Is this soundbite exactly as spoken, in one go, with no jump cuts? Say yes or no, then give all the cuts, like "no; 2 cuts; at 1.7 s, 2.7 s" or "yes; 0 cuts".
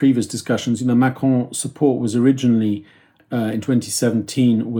yes; 0 cuts